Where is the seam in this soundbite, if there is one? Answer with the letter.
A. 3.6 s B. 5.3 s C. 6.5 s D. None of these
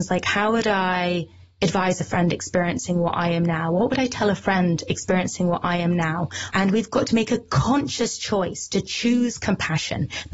C